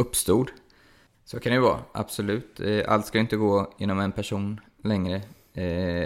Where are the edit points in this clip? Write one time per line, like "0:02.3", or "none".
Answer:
0:01.1